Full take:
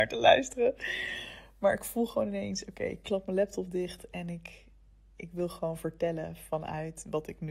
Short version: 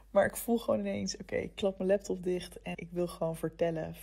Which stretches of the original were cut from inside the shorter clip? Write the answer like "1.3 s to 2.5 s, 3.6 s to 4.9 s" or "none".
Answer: 4.2 s to 5.2 s

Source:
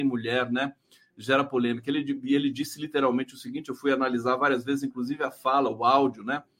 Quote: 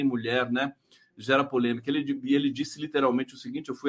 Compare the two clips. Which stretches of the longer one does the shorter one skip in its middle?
none

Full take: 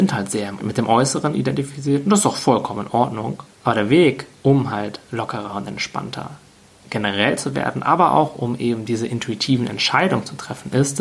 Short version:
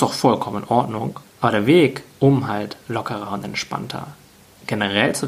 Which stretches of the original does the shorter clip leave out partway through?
none

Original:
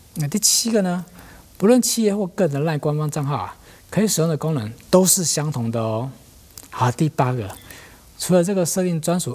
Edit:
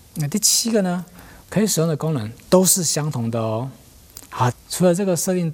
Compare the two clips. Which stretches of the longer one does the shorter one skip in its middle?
1.4 s to 3.8 s, 6.9 s to 8.0 s

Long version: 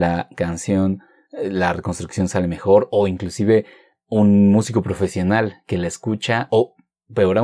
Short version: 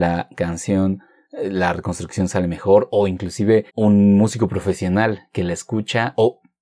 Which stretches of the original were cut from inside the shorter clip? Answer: 3.7 s to 4.0 s

